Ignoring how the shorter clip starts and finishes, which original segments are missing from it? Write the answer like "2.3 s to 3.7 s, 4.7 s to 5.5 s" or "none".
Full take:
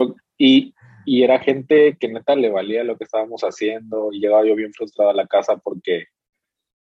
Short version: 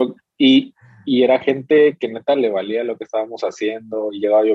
none